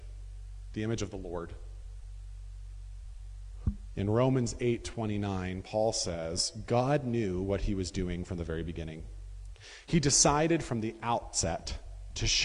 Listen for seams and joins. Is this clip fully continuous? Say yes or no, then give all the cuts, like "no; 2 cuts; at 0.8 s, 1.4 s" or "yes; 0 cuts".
no; 1 cut; at 4.0 s